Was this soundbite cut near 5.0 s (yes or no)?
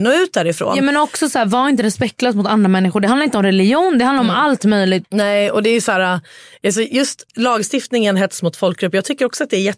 yes